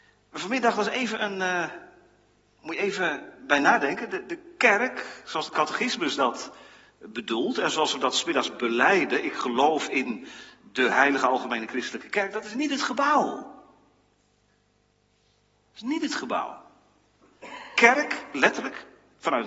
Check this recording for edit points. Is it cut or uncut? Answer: uncut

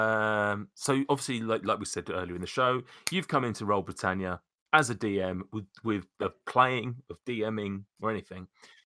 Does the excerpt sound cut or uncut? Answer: cut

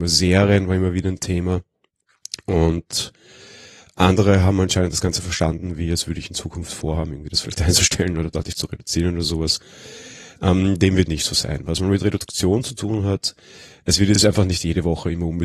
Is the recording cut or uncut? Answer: uncut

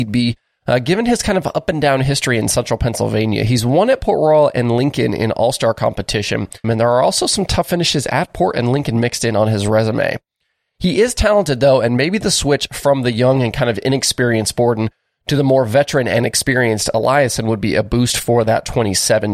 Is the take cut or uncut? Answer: cut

